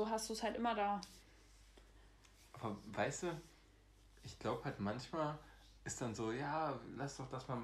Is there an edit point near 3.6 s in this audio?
no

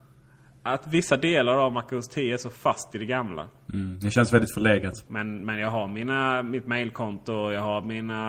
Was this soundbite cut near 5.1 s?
yes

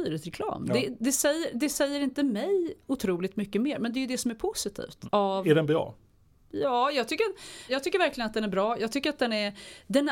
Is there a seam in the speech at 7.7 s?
yes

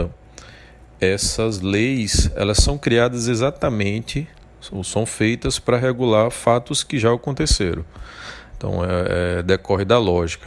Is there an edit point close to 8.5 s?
yes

